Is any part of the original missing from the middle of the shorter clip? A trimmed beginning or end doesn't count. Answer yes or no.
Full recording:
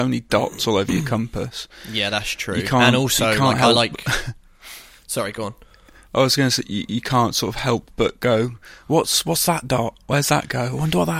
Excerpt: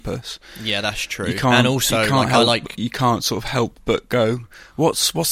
yes